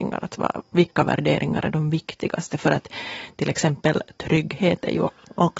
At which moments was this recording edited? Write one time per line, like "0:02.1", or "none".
none